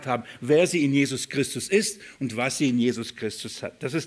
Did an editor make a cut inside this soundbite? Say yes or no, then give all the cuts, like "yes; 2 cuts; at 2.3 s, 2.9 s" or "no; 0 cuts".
no; 0 cuts